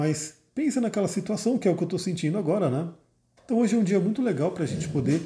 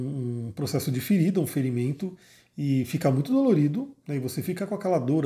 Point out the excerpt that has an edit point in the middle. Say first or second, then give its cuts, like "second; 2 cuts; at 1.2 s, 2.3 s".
first; 1 cut; at 3.4 s